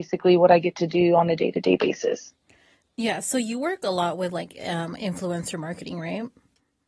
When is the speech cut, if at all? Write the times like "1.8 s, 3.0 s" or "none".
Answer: none